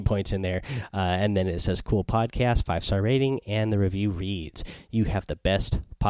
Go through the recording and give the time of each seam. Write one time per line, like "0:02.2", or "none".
none